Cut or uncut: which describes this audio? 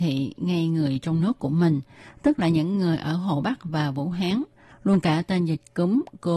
uncut